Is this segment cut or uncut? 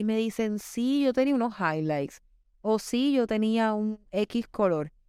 uncut